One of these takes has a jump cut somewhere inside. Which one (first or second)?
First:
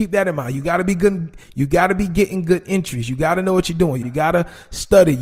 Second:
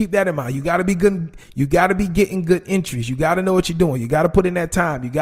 first